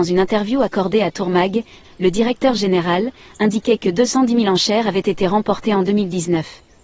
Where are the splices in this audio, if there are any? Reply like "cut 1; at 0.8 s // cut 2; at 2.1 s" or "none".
cut 1; at 1.8 s